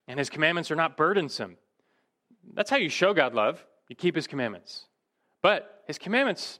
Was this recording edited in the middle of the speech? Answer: no; 0 cuts

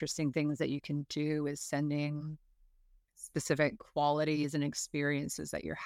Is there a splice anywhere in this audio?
no; 0 cuts

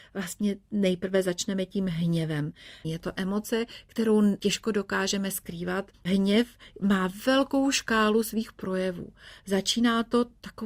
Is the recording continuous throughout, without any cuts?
no; 1 cut; at 2.8 s

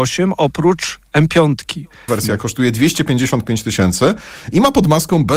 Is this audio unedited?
no; 1 cut; at 2.1 s

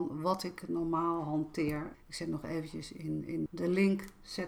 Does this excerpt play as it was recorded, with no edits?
no; 2 cuts; at 1.9 s, 3.5 s

